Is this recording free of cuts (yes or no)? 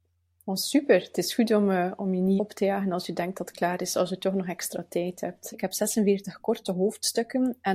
no